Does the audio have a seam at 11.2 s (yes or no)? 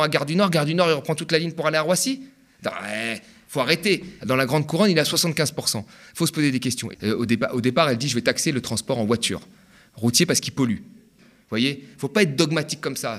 yes